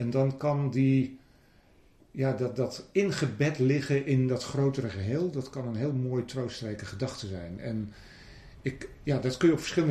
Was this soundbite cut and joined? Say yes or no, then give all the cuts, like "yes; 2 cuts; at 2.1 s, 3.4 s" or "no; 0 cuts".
no; 0 cuts